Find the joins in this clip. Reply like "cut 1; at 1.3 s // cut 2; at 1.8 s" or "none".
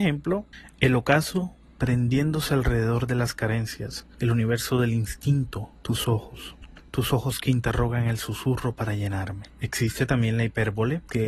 none